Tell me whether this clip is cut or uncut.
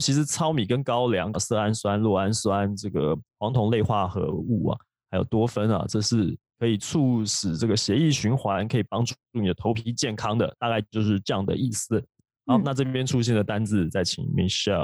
cut